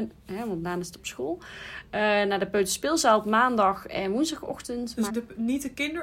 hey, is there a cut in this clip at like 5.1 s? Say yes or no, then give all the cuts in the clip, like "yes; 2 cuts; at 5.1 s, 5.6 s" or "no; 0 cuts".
yes; 1 cut; at 5.1 s